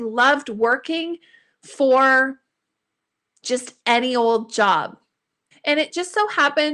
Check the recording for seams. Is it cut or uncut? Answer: cut